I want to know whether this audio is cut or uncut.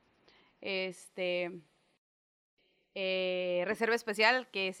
uncut